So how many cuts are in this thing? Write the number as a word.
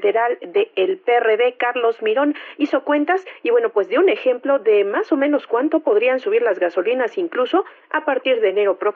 zero